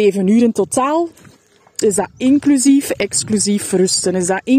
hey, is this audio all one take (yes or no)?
no